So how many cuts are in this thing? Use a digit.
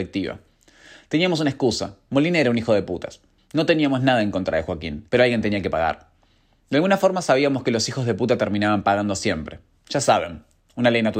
1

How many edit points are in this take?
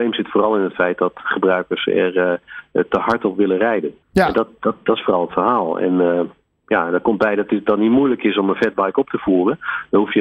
1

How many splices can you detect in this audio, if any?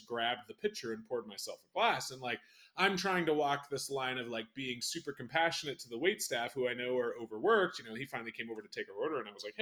0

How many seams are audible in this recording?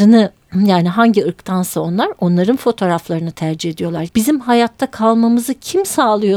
1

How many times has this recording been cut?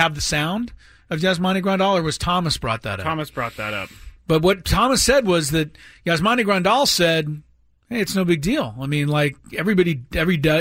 0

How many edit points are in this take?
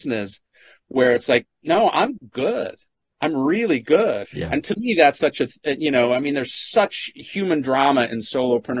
1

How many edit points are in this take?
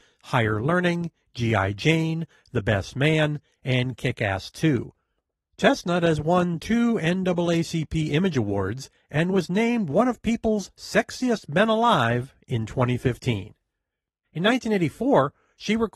1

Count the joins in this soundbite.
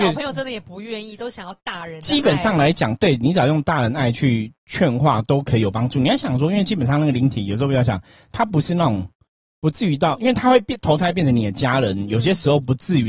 0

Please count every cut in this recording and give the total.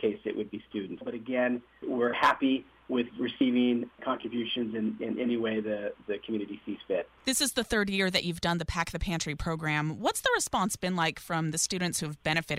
1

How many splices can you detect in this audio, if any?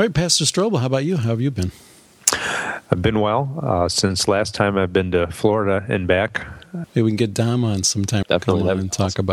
2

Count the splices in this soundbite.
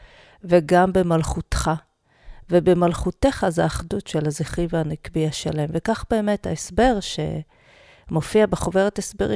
0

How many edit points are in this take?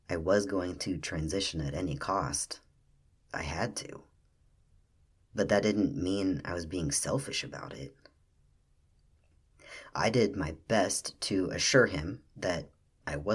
0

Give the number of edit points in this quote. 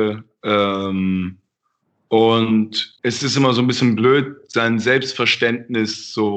1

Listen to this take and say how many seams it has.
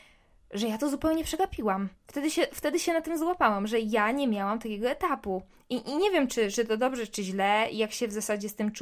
0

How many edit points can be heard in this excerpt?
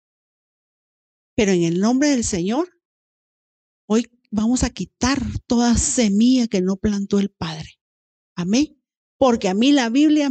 0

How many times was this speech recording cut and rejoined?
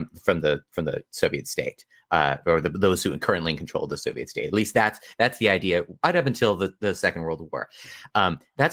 0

